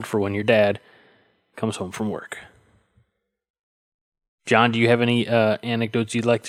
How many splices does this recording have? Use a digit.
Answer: 0